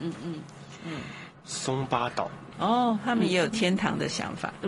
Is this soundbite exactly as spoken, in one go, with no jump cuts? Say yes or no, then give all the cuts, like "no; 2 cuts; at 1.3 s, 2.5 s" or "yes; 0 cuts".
no; 2 cuts; at 1.3 s, 2.5 s